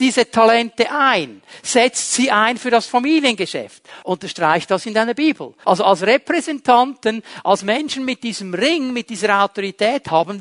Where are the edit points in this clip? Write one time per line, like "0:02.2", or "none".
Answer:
0:04.0
0:05.6